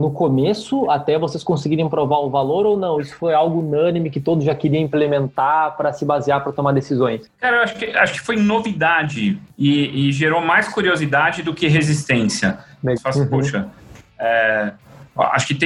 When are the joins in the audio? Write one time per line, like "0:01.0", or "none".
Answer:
0:13.0

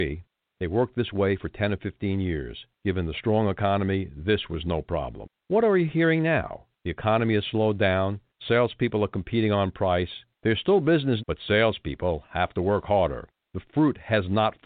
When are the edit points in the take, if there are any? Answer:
0:11.2

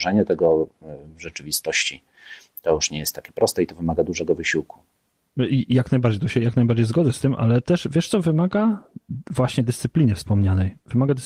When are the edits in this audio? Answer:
none

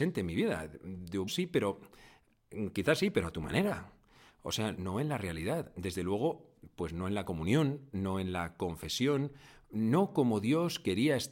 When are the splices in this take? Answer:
0:01.3
0:04.8

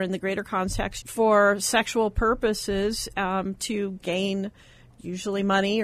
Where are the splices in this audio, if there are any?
0:01.0

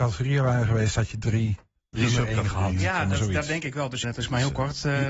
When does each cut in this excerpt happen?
0:04.0

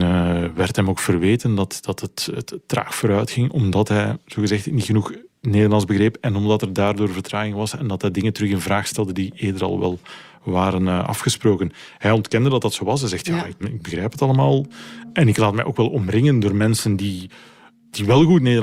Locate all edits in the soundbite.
0:13.6

